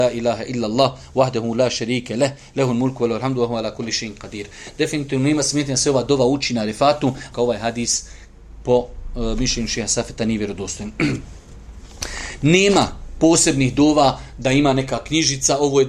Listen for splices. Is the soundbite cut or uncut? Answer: cut